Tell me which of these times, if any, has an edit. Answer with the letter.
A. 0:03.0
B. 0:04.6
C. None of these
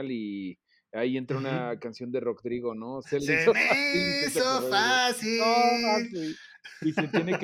A